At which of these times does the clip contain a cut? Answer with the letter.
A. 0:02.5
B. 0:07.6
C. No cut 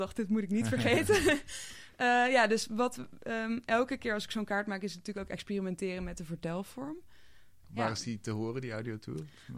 B